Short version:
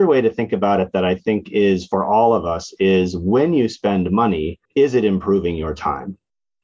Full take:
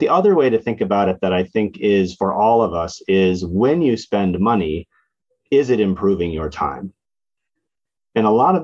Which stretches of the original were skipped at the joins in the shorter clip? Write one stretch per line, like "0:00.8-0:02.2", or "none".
0:04.9-0:05.4